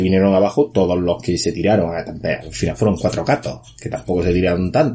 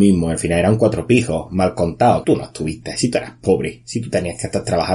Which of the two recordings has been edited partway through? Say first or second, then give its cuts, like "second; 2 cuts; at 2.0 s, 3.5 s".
second; 1 cut; at 2.2 s